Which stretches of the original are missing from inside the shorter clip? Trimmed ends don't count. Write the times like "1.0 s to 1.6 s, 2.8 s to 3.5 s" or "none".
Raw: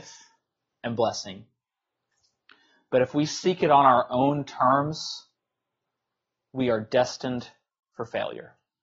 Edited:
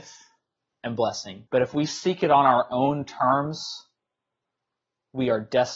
1.5 s to 2.9 s